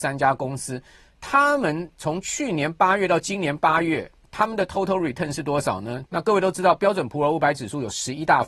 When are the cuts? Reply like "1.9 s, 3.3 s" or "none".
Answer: 6.1 s